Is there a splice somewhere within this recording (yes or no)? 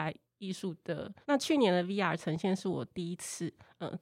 yes